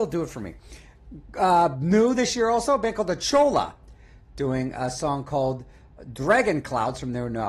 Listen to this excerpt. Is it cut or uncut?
uncut